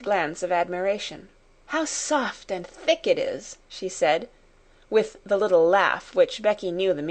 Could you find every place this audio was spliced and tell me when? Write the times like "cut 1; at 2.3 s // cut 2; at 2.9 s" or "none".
cut 1; at 1.6 s